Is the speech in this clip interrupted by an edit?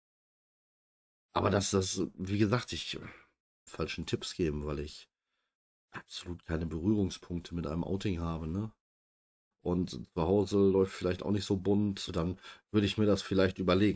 yes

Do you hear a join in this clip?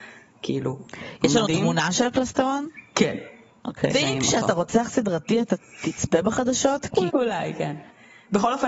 yes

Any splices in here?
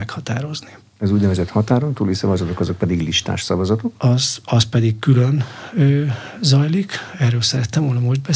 no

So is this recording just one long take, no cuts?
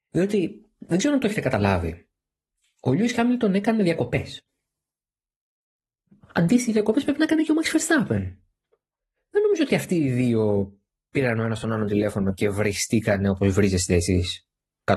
yes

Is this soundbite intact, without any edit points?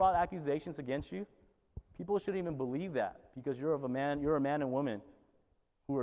yes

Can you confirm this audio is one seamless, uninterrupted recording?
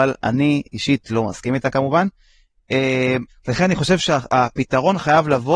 no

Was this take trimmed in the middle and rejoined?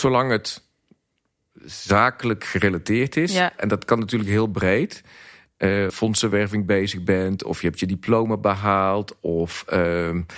yes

